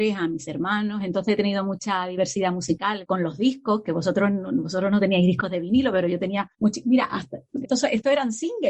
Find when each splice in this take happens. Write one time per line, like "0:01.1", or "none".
0:03.0
0:07.6